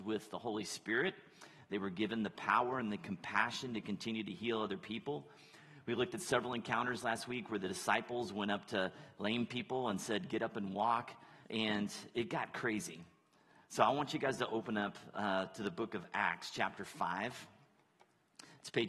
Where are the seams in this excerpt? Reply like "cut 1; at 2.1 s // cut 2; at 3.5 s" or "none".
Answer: cut 1; at 11.4 s